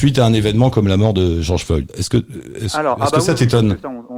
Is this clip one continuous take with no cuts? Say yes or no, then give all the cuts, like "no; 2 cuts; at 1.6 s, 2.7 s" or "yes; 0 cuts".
yes; 0 cuts